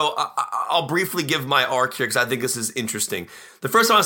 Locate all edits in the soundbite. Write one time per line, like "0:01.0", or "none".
none